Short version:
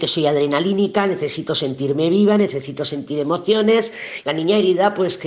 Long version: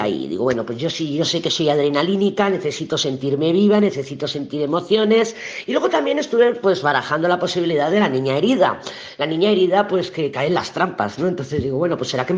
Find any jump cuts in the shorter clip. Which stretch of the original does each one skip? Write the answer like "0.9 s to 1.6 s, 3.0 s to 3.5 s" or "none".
5.6 s to 9.2 s